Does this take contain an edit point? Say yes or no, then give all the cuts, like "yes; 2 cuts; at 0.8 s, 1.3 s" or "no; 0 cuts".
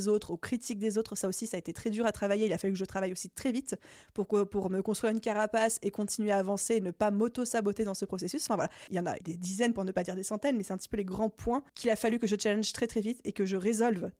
yes; 2 cuts; at 9.2 s, 11.7 s